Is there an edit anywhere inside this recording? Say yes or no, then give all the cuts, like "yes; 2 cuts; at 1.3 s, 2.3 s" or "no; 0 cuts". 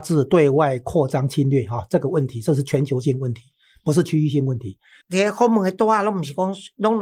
yes; 1 cut; at 5.0 s